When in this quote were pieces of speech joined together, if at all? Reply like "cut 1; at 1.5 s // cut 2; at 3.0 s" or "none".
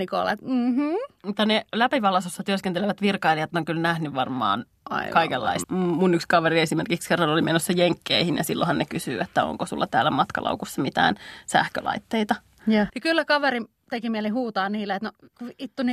cut 1; at 5.6 s // cut 2; at 12.9 s

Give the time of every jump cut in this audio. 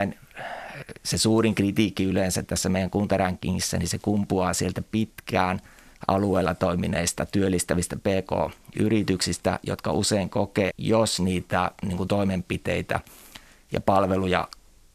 cut 1; at 10.7 s

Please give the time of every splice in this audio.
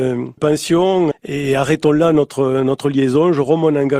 cut 1; at 1.1 s

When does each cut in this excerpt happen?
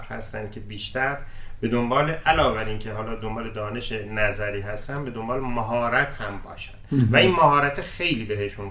none

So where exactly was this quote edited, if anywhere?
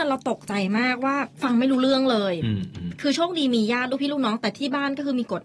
cut 1; at 1.3 s

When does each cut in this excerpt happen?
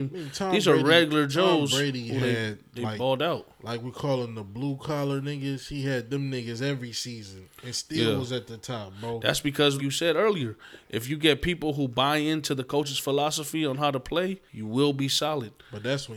cut 1; at 9.8 s // cut 2; at 14.5 s

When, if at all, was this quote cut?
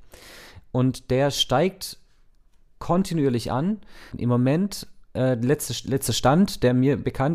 cut 1; at 4.1 s

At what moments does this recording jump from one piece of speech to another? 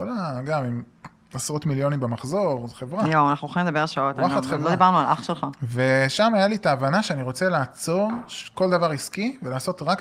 none

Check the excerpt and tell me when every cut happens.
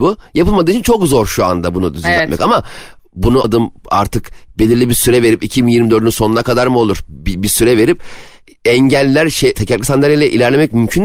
cut 1; at 3.4 s // cut 2; at 9.5 s

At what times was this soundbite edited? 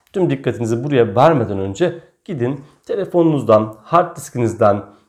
none

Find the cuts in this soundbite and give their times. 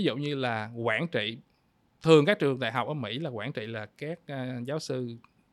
none

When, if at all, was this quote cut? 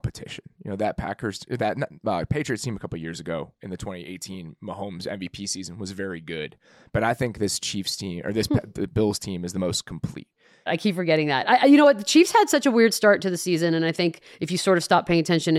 cut 1; at 10.7 s

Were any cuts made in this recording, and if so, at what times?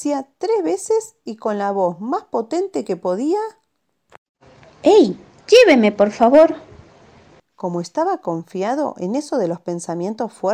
cut 1; at 5.4 s // cut 2; at 7.4 s

